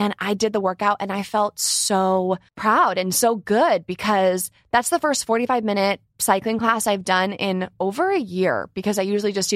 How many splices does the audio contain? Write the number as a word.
one